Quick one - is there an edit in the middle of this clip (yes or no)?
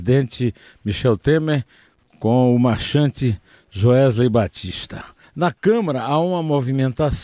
yes